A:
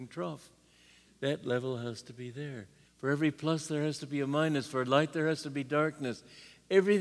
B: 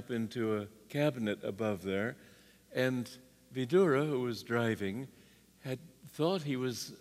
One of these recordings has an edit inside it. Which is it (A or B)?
A